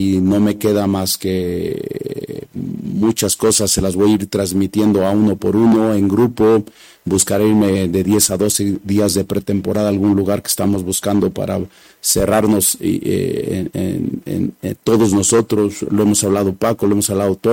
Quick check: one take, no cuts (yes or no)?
yes